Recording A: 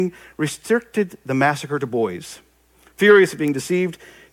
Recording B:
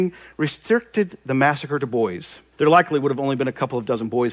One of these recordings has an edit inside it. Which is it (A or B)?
B